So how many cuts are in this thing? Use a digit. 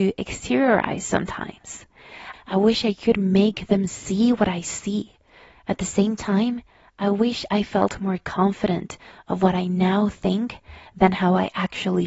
1